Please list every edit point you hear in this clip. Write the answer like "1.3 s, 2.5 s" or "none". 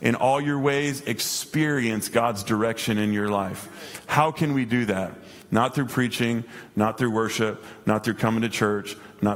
none